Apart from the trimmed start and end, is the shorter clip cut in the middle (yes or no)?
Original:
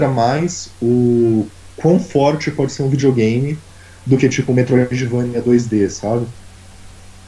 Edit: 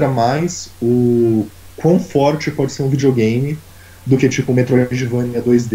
no